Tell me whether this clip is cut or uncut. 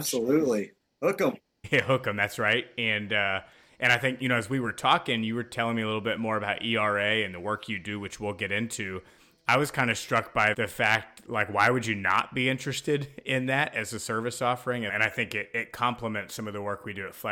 cut